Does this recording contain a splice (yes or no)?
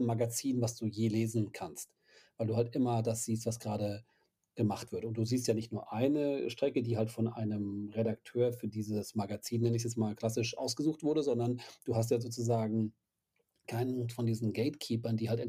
no